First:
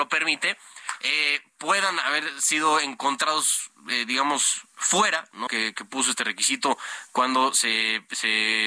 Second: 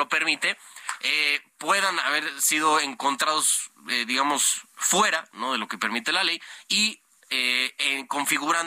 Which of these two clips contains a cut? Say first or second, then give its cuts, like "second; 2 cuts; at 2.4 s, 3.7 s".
first; 1 cut; at 5.5 s